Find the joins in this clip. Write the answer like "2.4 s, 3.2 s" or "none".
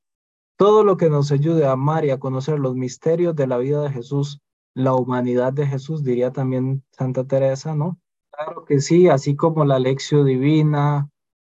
8.2 s